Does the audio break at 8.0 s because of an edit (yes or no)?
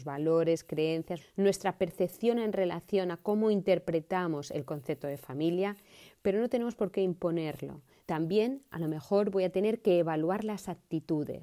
yes